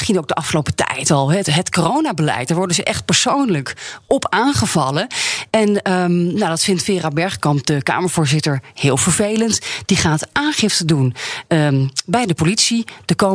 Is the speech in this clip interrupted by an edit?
no; 0 cuts

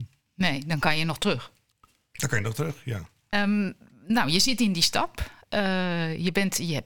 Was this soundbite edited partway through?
yes; 1 cut; at 3.3 s

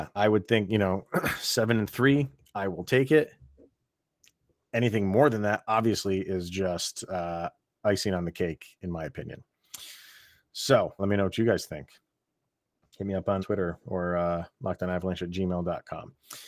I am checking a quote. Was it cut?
yes; 2 cuts; at 11.0 s, 13.4 s

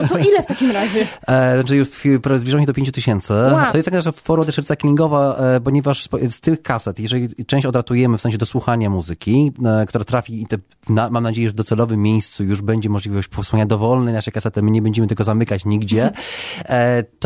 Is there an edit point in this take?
yes; 1 cut; at 3.7 s

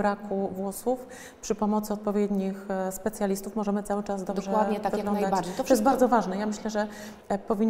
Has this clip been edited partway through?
no; 0 cuts

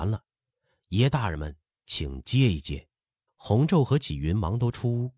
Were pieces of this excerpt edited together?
yes; 1 cut; at 3.3 s

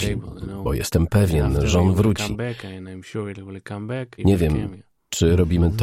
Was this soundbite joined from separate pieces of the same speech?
yes; 1 cut; at 4.2 s

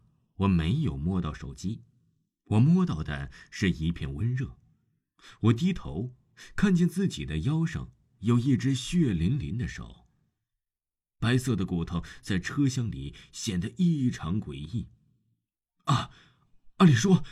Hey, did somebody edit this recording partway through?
no; 0 cuts

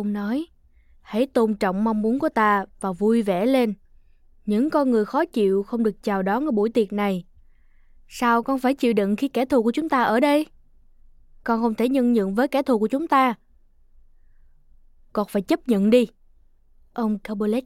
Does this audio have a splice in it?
no; 0 cuts

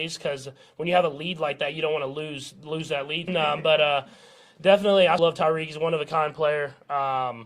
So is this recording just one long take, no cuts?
no; 2 cuts; at 3.3 s, 5.2 s

